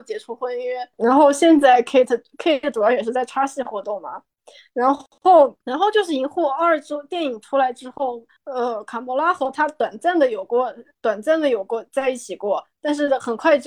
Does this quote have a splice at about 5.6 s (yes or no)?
yes